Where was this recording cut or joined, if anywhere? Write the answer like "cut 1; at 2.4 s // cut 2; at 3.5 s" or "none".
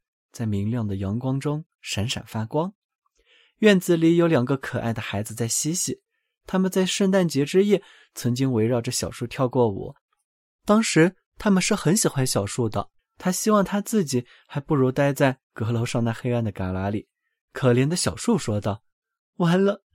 cut 1; at 13.0 s // cut 2; at 17.4 s